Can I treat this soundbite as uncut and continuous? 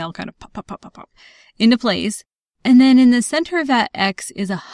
yes; 0 cuts

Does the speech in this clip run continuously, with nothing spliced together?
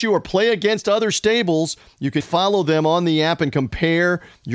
no; 1 cut; at 2.2 s

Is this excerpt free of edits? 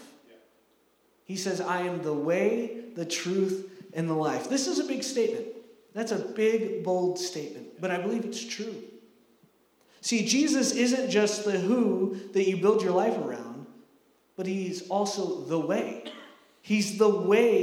yes; 0 cuts

